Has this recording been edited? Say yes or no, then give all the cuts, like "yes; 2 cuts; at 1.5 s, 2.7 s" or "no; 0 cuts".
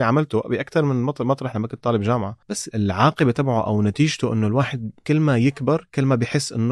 yes; 1 cut; at 2.4 s